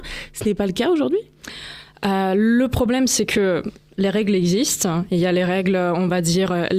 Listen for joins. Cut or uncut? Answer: uncut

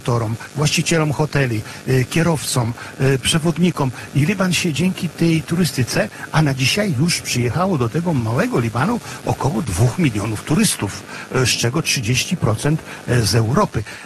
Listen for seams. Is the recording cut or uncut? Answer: uncut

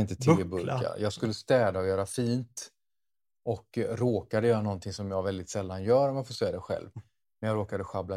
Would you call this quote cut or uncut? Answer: uncut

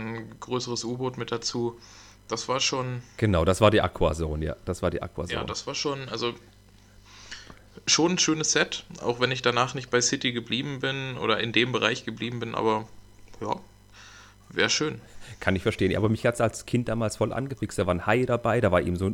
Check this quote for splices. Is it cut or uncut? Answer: uncut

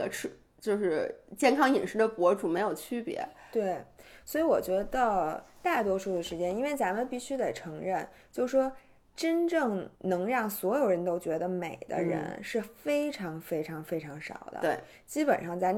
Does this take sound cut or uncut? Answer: cut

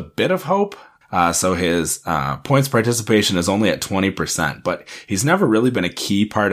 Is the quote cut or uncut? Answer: cut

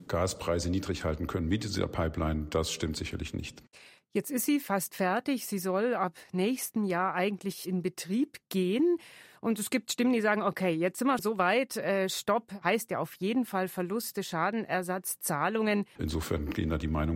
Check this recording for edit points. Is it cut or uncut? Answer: cut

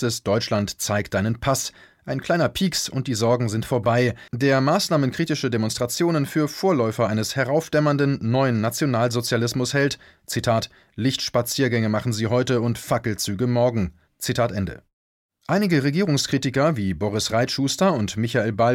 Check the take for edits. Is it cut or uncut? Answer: cut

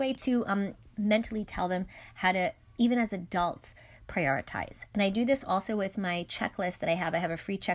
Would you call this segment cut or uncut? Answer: uncut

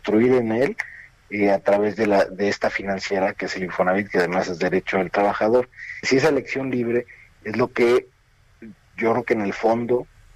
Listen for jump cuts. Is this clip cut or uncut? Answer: cut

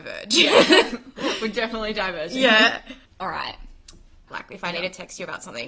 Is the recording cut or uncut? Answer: cut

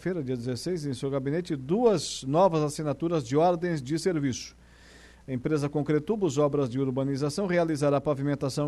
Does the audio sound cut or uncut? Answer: uncut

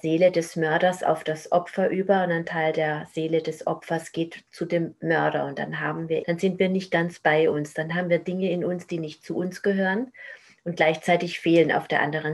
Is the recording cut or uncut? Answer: cut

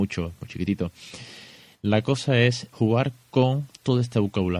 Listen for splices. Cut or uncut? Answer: cut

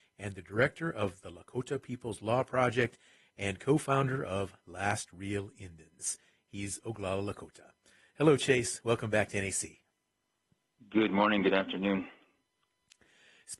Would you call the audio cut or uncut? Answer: uncut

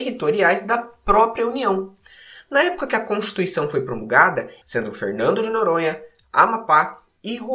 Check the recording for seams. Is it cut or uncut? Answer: cut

